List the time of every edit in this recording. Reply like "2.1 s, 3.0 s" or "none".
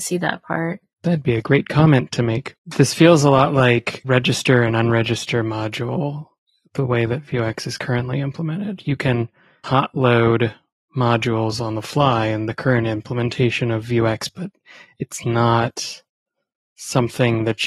0.9 s, 2.6 s